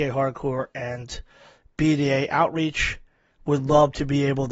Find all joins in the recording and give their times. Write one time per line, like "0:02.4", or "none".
none